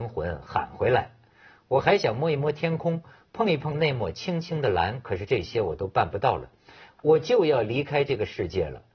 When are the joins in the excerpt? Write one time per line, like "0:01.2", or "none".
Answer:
none